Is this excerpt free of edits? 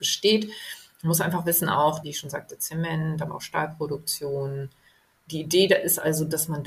no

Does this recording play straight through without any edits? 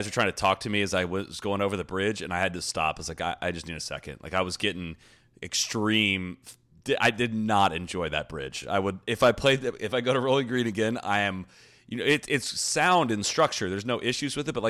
yes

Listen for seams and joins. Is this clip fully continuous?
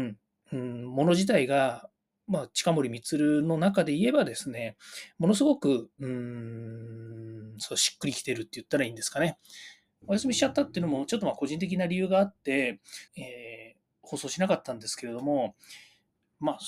no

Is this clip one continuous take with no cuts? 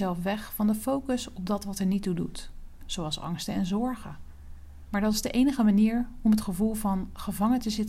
no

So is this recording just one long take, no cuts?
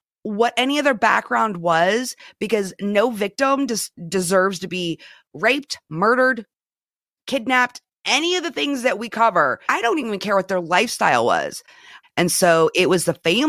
no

